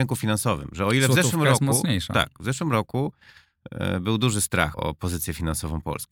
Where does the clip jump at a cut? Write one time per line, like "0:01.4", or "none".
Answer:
0:04.7